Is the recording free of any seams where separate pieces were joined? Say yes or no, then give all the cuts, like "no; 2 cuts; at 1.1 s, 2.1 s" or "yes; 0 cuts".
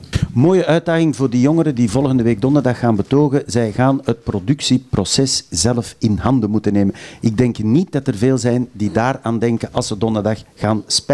yes; 0 cuts